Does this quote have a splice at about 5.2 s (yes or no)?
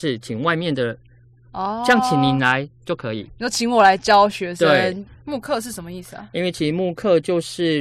yes